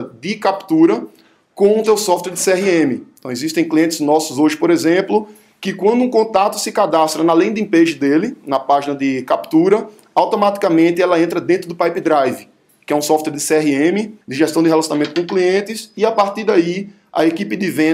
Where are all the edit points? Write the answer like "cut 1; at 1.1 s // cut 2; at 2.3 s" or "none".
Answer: cut 1; at 14.2 s